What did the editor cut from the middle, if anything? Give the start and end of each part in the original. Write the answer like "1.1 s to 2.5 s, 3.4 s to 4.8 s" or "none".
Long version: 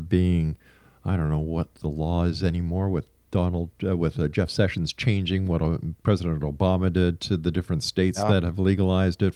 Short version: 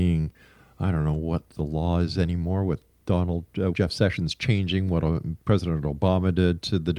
4.0 s to 4.3 s